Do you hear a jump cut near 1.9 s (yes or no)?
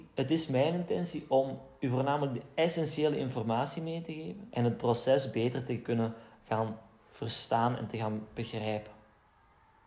no